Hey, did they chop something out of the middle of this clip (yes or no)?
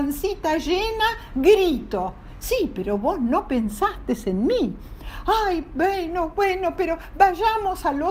no